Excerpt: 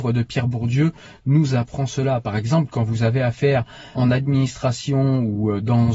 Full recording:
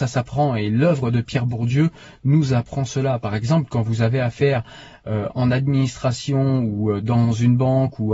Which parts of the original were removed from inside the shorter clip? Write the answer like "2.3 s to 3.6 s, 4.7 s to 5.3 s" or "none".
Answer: 4.9 s to 5.3 s